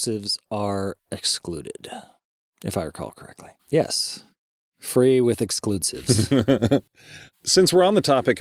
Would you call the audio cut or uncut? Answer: cut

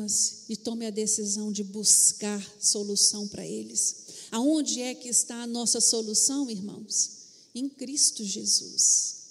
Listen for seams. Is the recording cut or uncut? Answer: uncut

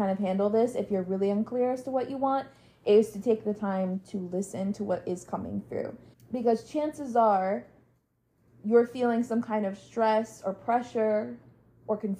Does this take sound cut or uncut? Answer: cut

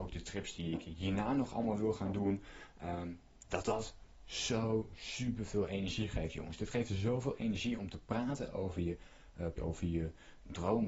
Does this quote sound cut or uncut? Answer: cut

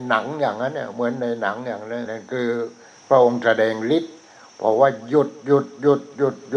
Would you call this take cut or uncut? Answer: cut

